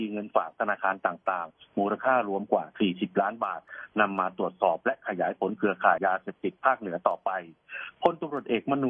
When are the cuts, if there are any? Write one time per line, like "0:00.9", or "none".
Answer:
0:06.0